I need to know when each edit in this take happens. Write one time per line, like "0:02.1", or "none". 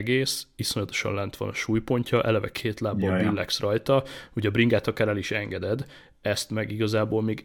none